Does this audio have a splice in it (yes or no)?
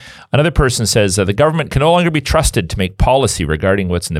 no